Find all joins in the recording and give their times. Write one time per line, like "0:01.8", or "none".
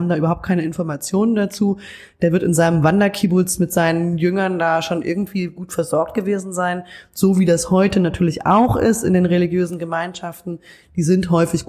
none